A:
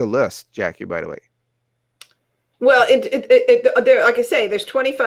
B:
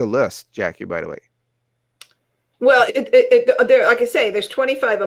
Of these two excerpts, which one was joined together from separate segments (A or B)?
B